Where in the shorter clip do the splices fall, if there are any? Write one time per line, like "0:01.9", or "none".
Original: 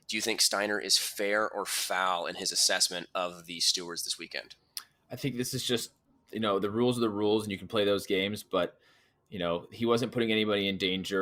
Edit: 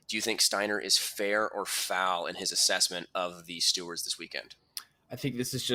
none

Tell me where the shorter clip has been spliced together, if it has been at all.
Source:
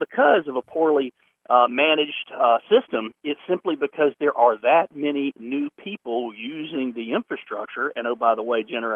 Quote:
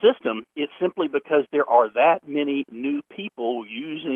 none

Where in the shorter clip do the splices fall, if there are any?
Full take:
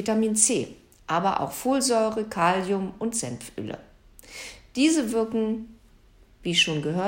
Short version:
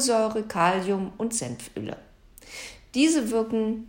none

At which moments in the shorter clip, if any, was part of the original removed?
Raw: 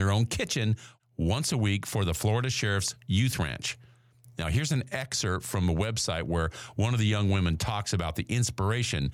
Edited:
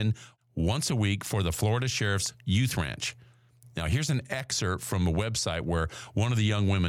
none

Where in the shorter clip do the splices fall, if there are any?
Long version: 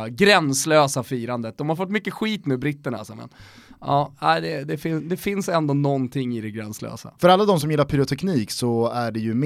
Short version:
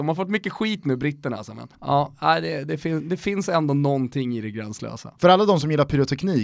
0:01.7

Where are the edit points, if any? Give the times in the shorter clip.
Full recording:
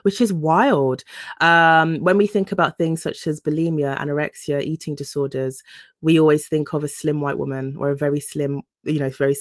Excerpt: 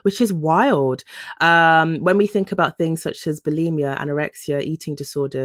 none

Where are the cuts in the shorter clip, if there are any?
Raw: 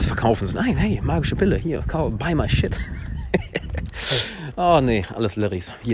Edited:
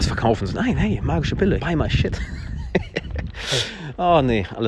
0:01.6

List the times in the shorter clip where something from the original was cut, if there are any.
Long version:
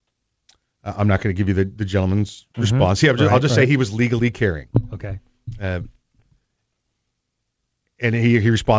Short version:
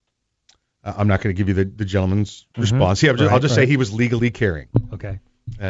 none

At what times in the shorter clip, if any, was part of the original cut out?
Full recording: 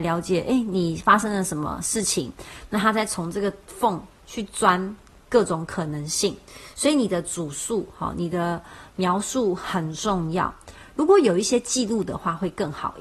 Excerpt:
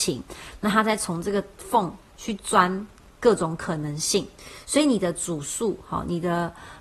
none

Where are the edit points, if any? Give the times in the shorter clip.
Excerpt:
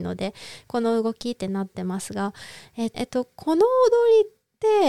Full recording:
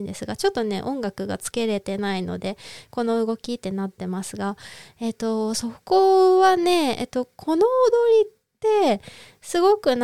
0:02.9

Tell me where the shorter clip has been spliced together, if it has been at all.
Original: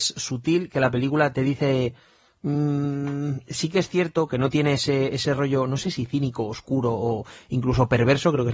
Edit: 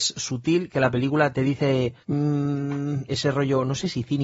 0:02.0
0:03.1

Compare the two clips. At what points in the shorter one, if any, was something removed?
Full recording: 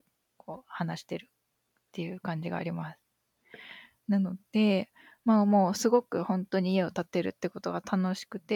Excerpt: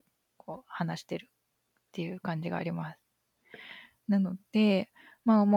none

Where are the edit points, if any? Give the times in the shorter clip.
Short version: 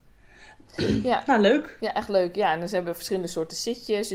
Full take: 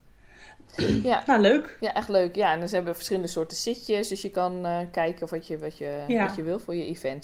none

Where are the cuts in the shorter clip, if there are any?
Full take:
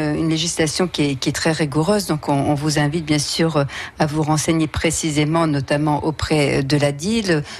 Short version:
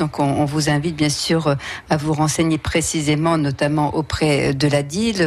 none

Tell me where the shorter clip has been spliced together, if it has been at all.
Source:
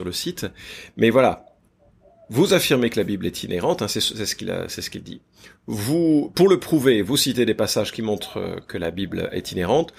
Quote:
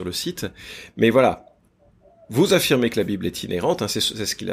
none

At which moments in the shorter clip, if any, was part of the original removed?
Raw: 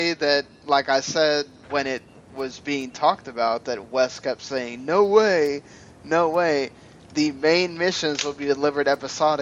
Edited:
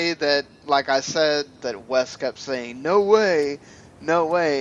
0:01.6

